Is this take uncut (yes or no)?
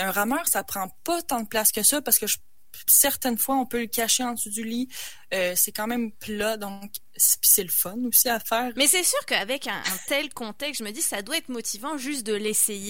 no